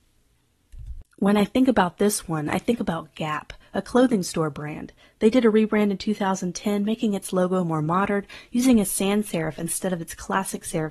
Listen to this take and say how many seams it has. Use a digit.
0